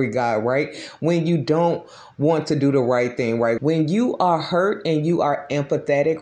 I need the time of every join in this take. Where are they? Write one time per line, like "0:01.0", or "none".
0:03.6

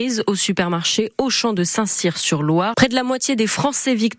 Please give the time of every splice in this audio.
0:02.7

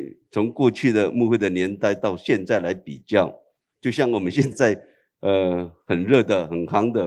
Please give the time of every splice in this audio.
0:04.5

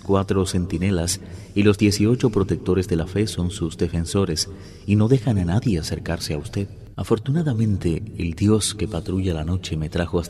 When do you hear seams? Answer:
none

